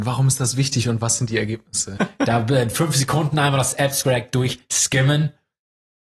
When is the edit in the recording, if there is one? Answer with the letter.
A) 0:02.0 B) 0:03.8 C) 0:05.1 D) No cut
A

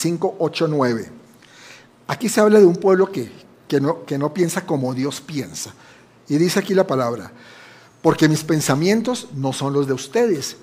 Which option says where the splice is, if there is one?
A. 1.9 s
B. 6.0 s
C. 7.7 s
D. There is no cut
D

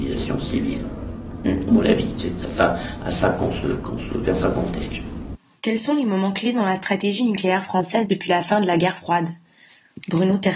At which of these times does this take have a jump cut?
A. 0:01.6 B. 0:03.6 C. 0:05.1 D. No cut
D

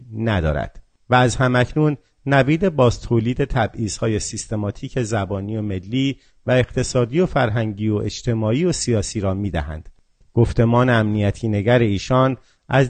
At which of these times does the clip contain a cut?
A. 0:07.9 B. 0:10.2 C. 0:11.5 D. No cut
B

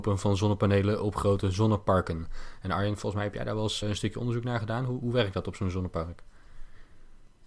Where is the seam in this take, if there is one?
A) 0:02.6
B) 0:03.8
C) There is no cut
B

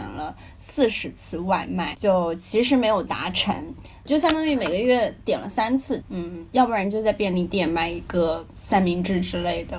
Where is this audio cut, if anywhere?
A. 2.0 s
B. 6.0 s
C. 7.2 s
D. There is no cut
B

